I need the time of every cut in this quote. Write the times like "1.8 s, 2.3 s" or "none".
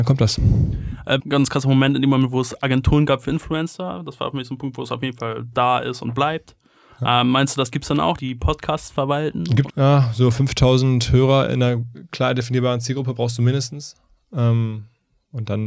1.2 s, 8.2 s, 9.7 s